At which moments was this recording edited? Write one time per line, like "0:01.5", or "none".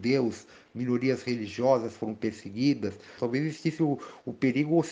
0:03.2

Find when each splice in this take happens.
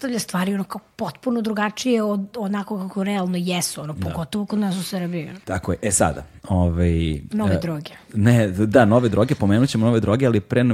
0:05.4

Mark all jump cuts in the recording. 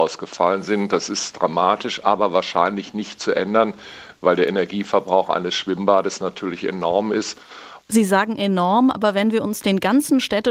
0:07.8

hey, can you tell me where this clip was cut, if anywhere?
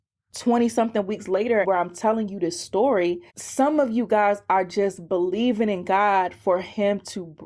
0:01.6
0:03.3

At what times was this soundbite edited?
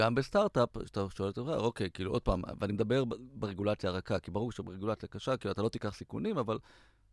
none

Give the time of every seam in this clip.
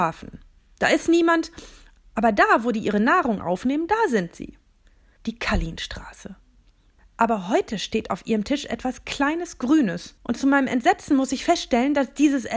0:05.2
0:07.0
0:10.2

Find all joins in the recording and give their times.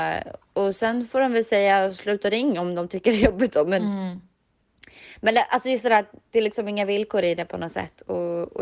none

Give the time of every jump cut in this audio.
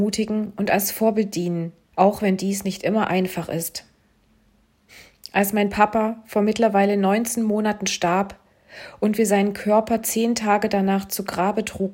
0:01.9

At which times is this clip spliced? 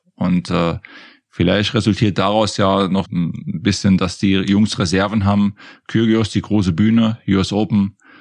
0:03.0

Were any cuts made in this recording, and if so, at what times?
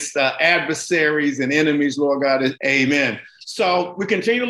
0:02.6

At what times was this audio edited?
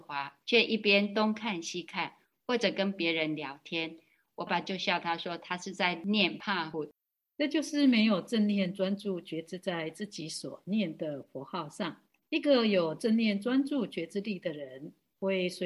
0:04.5

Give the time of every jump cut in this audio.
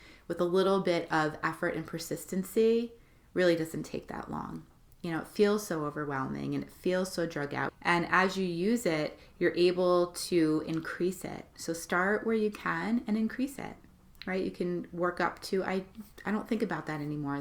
0:07.7

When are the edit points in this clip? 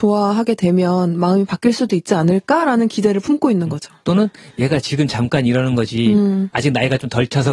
none

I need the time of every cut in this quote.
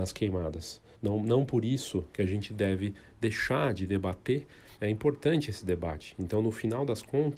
0:00.9
0:04.8

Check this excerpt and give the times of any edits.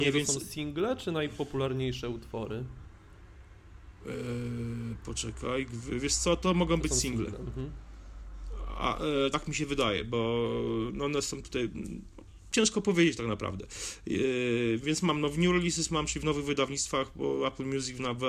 none

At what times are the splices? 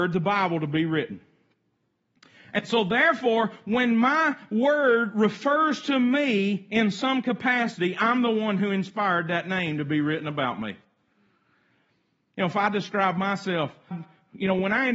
0:13.9

